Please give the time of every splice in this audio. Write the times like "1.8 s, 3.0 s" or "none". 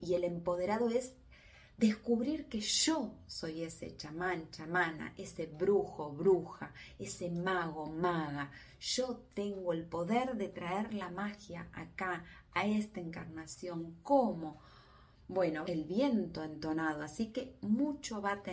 15.6 s